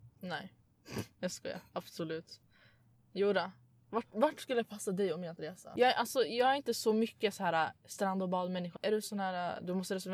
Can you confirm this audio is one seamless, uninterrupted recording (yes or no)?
no